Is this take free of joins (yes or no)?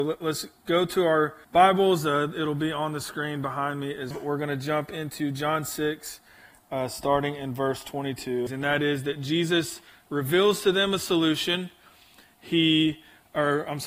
no